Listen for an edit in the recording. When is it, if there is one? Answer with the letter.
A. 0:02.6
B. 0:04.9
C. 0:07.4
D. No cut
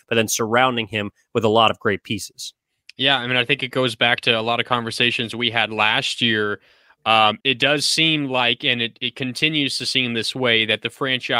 C